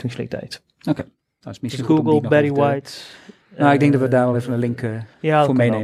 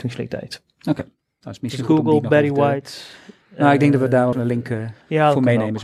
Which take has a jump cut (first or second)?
second